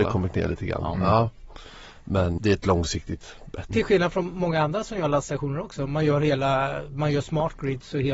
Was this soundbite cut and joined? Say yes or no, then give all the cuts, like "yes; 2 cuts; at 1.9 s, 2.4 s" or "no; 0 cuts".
yes; 2 cuts; at 2.4 s, 3.7 s